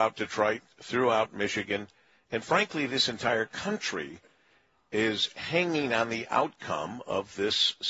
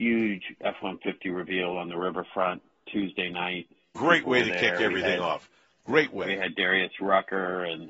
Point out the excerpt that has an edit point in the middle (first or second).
second